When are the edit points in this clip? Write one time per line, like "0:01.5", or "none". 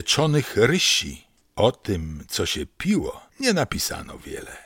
0:03.3